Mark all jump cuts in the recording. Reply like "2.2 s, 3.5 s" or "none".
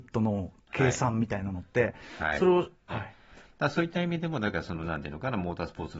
2.9 s